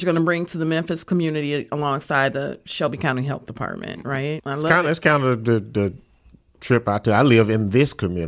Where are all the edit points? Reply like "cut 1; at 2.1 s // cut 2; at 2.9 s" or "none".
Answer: cut 1; at 4.4 s